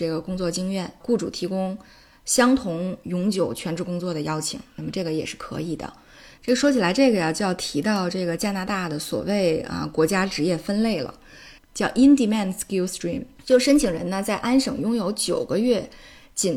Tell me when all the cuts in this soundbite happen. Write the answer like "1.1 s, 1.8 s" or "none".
6.4 s, 11.6 s